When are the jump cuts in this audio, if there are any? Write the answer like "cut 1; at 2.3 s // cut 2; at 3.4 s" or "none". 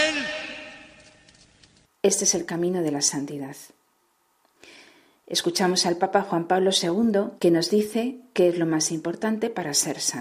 cut 1; at 1.8 s // cut 2; at 5.1 s // cut 3; at 7.4 s

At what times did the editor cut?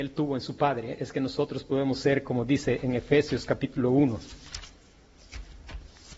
none

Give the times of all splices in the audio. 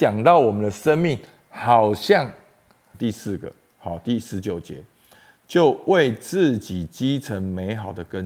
cut 1; at 2.9 s

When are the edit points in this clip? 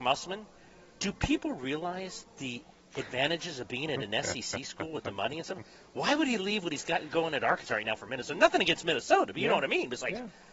none

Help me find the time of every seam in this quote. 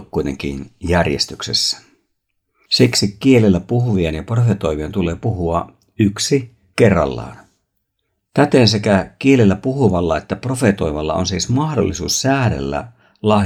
none

